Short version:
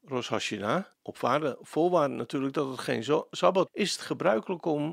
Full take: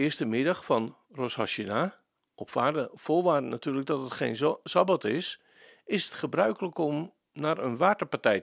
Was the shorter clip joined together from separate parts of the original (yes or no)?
yes